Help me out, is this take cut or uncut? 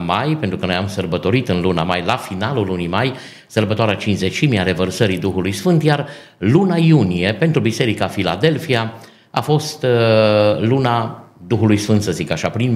uncut